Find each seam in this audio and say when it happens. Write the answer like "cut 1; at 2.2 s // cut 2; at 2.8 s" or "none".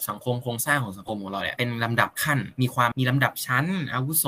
cut 1; at 2.9 s

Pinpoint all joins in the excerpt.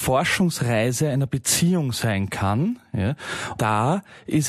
cut 1; at 3.6 s

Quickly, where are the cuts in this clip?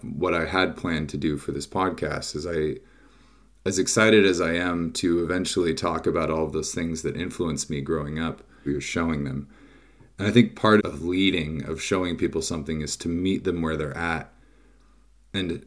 cut 1; at 8.7 s // cut 2; at 10.8 s

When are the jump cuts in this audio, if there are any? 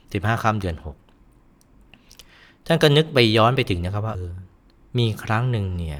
cut 1; at 4.1 s

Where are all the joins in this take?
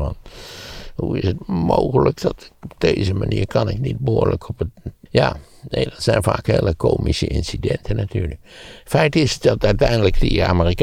cut 1; at 5.1 s

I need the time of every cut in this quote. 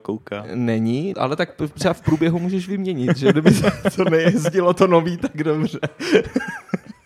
cut 1; at 1.1 s

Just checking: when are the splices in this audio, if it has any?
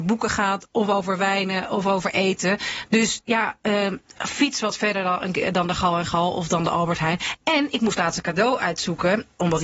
none

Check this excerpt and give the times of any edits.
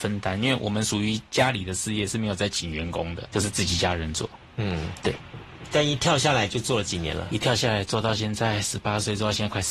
cut 1; at 3.3 s

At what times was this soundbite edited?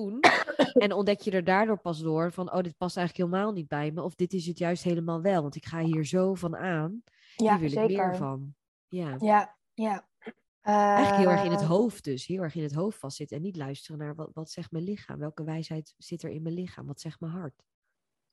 cut 1; at 10.5 s

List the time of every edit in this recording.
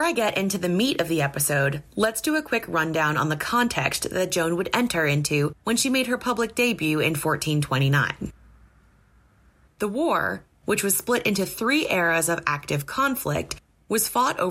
cut 1; at 9.7 s

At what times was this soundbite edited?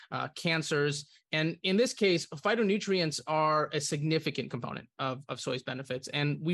none

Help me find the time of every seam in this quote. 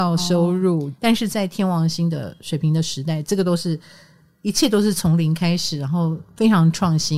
none

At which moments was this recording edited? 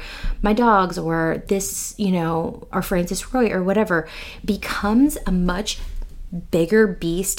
cut 1; at 2.7 s

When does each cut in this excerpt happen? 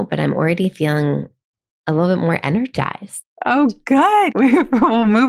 cut 1; at 4.3 s

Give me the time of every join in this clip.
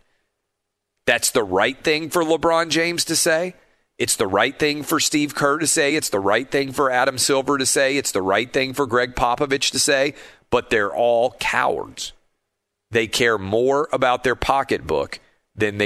none

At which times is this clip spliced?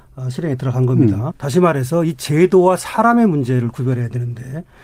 cut 1; at 1.3 s

